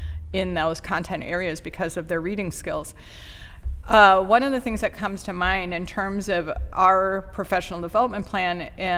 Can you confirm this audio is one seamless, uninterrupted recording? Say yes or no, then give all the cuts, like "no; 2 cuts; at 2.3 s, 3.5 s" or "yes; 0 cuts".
yes; 0 cuts